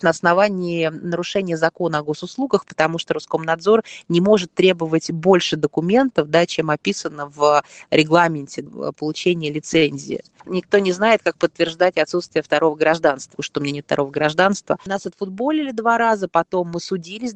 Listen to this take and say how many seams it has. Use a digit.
2